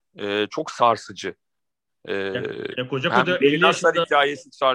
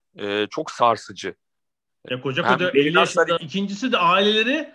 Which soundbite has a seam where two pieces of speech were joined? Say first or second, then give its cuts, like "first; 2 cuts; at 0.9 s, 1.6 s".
second; 2 cuts; at 2.1 s, 3.4 s